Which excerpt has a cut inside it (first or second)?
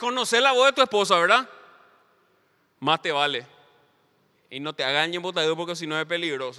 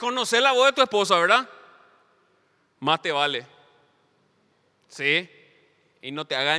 first